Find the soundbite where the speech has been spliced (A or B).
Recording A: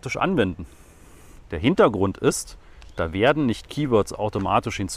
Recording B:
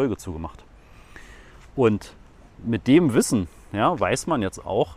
A